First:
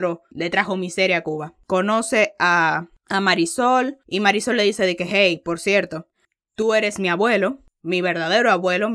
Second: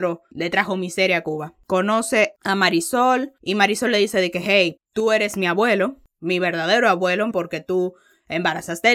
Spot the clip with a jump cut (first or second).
second